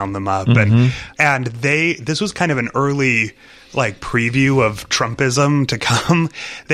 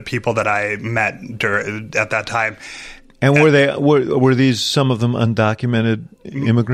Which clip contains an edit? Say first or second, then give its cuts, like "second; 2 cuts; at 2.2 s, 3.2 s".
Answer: first; 1 cut; at 1.1 s